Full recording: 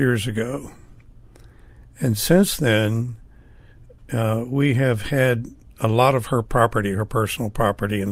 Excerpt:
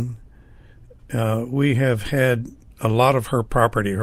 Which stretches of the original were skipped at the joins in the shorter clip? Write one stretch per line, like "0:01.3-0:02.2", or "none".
none

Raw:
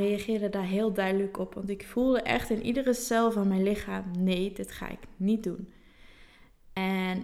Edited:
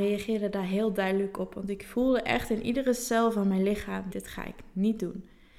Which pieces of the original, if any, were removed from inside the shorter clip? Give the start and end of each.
0:04.1-0:04.5

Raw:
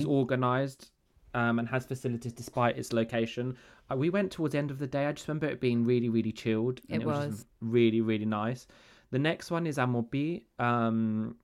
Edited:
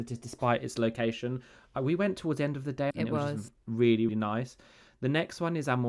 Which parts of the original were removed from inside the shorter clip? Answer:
0:05.0-0:06.8
0:08.0-0:08.2

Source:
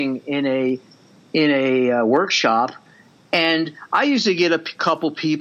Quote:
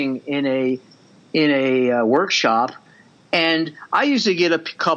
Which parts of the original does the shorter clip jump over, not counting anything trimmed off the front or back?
none

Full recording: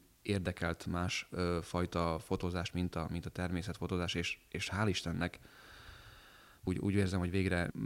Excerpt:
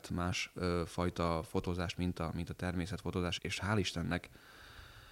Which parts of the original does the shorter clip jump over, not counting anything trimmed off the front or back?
0:04.1-0:04.5

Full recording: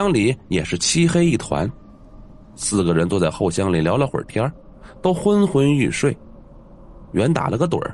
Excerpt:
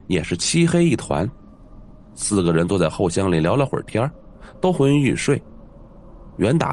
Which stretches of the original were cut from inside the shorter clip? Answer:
0:05.1-0:05.5

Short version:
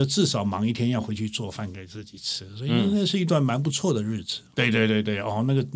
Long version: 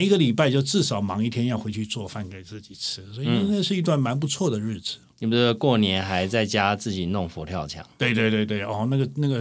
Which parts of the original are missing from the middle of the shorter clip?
0:05.1-0:08.0

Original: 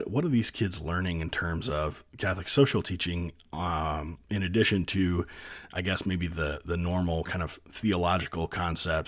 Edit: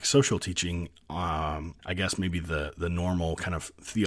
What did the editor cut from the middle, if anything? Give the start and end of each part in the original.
0:04.2-0:05.7

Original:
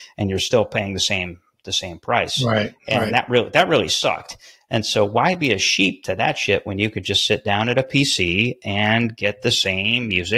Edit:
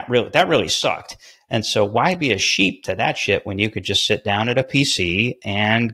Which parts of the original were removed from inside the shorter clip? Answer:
none

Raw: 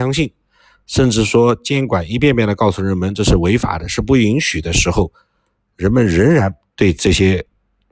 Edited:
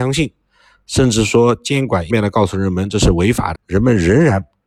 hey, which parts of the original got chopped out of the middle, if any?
0:02.1-0:02.4
0:03.8-0:05.7

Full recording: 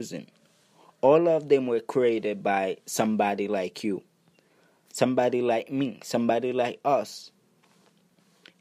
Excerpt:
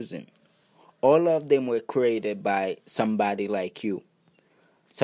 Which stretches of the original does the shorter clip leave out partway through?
none

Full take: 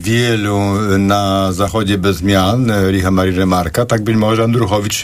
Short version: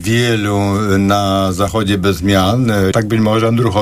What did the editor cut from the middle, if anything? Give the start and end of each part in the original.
0:02.9-0:03.9

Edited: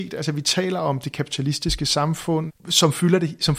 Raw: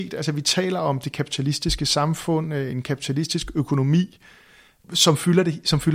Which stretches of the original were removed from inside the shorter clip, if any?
0:02.5-0:04.7

